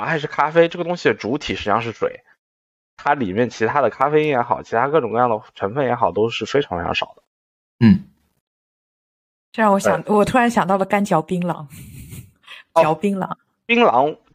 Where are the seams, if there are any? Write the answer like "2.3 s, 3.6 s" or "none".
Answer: none